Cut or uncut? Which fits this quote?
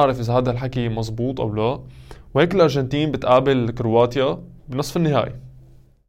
cut